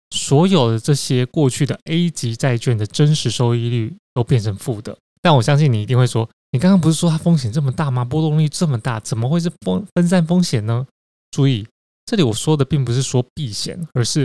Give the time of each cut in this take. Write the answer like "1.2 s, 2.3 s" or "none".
5.2 s